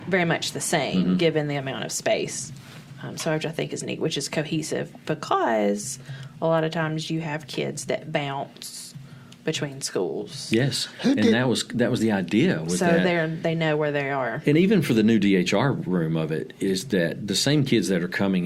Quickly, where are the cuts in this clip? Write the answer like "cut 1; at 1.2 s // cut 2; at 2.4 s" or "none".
none